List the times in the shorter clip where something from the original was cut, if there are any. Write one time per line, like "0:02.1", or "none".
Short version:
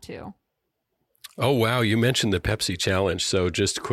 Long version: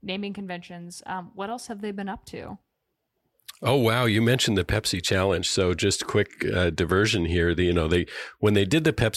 none

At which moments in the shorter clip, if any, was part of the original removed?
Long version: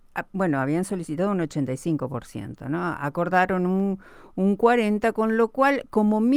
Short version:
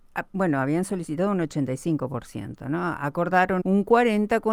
0:03.6

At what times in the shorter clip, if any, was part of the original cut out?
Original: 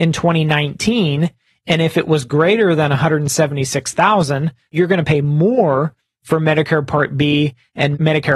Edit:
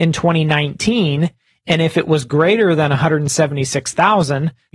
none

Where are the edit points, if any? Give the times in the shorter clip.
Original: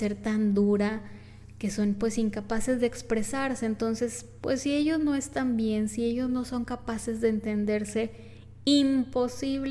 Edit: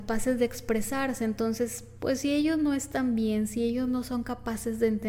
none

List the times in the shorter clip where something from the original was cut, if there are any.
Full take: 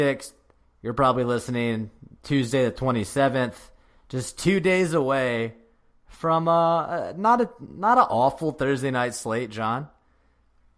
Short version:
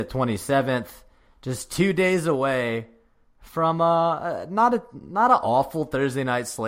none

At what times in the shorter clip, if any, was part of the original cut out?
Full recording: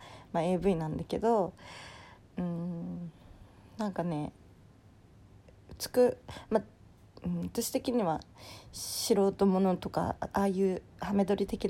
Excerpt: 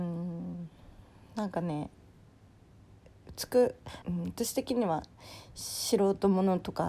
0:04.0

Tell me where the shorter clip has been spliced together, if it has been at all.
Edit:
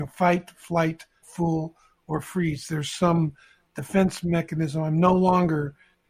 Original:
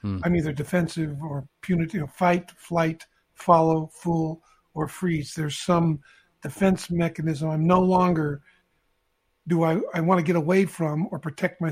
0:01.2

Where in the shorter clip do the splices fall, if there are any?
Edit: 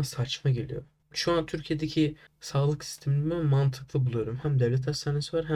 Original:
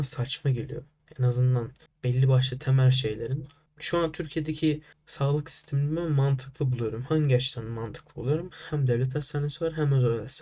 0:01.0
0:04.4

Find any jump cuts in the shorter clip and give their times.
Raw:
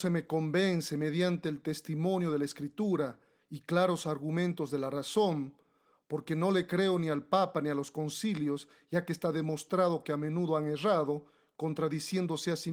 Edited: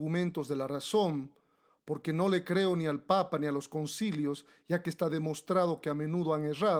none

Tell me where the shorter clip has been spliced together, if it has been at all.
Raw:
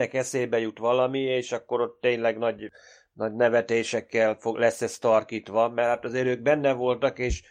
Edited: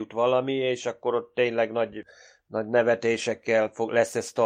none

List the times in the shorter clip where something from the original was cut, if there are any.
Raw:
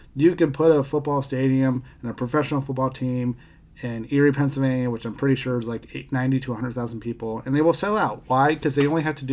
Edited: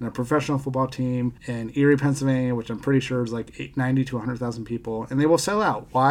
0:01.4

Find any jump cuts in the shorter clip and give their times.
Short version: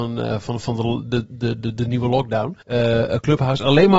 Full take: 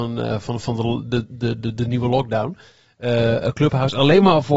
0:02.6

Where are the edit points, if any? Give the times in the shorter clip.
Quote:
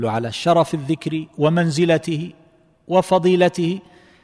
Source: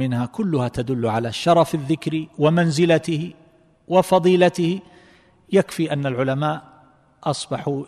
none

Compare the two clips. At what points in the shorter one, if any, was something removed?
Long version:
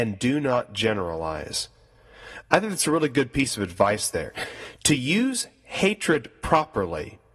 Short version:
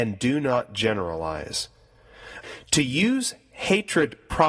0:02.4

